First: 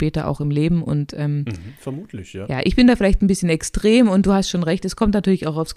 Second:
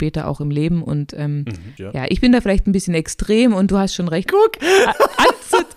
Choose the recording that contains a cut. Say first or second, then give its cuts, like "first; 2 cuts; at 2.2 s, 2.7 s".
second; 2 cuts; at 1.8 s, 4.3 s